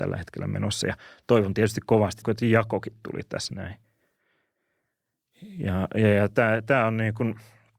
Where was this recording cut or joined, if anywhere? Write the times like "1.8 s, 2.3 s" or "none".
2.2 s